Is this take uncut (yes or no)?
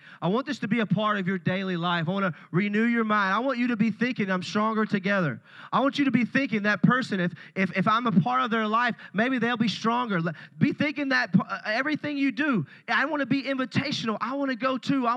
yes